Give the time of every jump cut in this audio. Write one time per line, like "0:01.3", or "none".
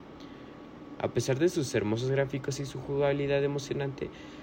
0:01.0